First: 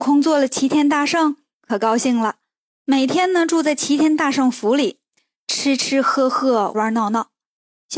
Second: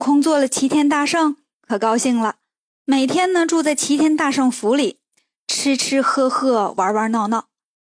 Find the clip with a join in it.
first; 1 cut; at 6.7 s

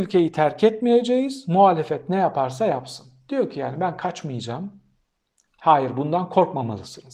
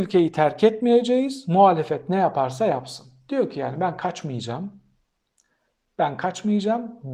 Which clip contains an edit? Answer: first; 1 cut; at 5.4 s

